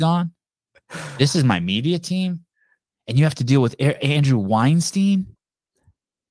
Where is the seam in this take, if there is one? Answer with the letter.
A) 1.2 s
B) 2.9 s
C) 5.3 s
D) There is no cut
B